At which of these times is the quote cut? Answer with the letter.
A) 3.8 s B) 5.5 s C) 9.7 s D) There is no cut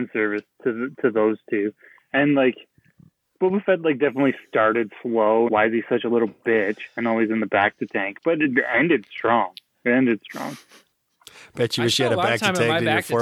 B